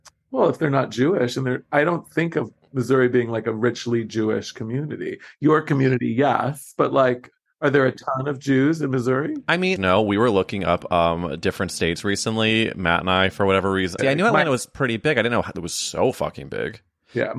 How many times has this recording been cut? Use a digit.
2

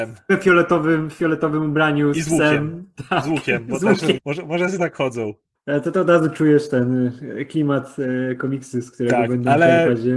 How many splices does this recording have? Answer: 2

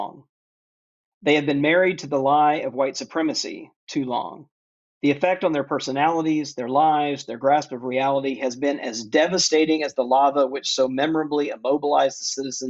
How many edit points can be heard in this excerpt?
0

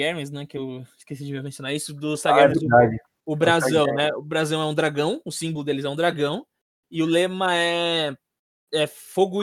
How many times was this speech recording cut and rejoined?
0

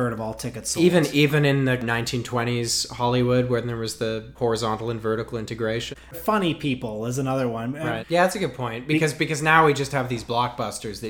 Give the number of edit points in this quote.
3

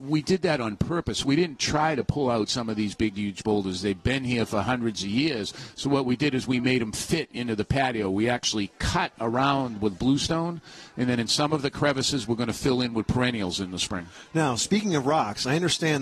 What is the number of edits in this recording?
0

